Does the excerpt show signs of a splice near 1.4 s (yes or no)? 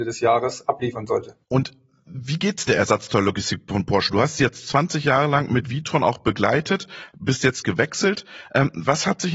yes